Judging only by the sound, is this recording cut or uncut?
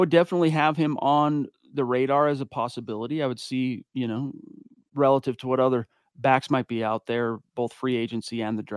uncut